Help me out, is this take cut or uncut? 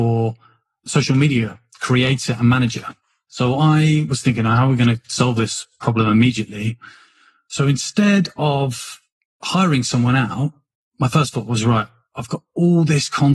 uncut